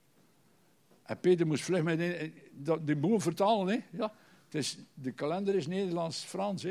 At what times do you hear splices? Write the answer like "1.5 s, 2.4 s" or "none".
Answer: none